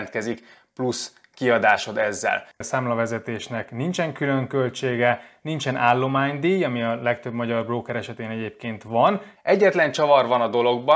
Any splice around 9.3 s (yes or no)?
yes